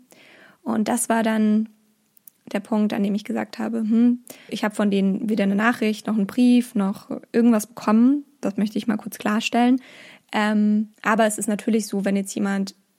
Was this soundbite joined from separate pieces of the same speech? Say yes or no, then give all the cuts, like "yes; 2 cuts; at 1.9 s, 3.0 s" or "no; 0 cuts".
yes; 2 cuts; at 4.5 s, 10.9 s